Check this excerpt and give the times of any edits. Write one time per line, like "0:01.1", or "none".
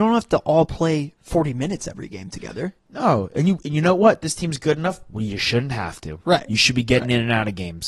0:01.2